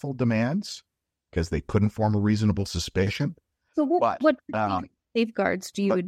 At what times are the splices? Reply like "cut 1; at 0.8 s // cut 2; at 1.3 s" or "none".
cut 1; at 3.7 s